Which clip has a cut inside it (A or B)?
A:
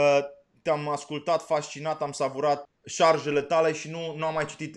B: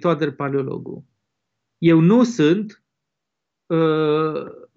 A